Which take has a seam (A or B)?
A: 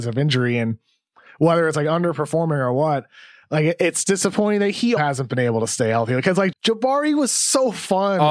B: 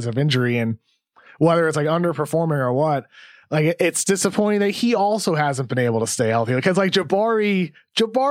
A